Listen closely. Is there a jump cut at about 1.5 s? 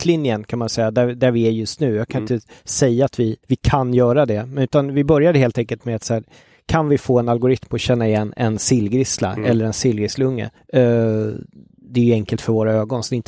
no; 2 cuts; at 3.4 s, 10.6 s

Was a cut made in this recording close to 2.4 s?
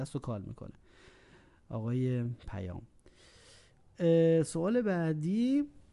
yes; 1 cut; at 2.4 s

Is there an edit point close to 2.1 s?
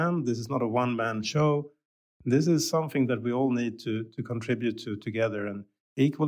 no; 0 cuts

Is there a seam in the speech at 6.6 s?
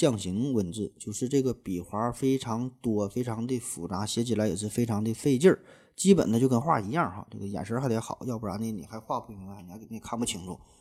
yes; 1 cut; at 6.6 s

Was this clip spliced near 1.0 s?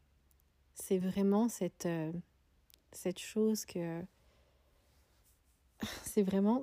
no; 0 cuts

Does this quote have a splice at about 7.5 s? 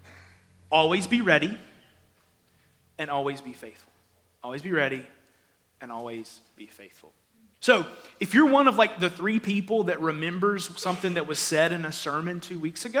yes; 1 cut; at 7.5 s

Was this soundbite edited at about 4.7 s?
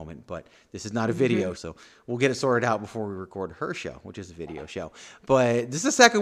no; 1 cut; at 1.6 s

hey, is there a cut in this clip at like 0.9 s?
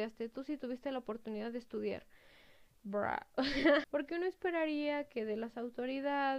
no; 2 cuts; at 2.7 s, 3.8 s

